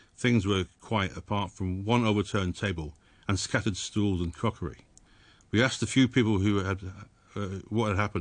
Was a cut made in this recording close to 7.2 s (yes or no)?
no